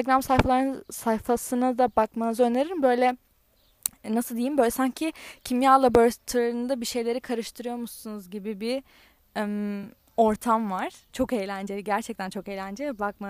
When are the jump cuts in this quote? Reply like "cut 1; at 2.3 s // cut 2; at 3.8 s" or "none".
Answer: none